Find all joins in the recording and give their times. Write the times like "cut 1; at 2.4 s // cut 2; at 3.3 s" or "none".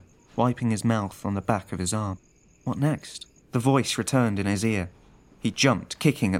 cut 1; at 3.4 s